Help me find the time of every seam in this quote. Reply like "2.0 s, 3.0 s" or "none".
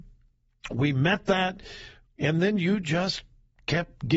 2.1 s